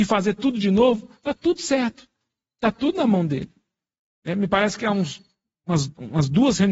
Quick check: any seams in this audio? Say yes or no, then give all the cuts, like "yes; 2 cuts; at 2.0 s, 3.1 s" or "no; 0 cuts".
no; 0 cuts